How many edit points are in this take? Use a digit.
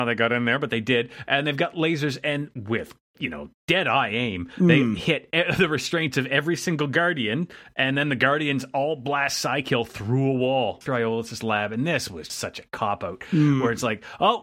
2